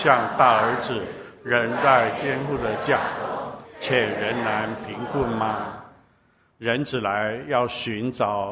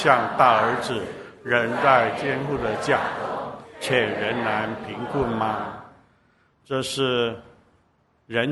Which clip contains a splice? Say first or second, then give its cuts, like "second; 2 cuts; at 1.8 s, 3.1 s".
first; 1 cut; at 6.5 s